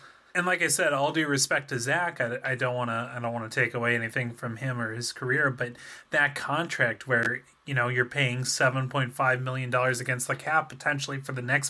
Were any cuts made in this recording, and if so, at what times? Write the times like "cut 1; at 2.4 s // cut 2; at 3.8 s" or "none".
none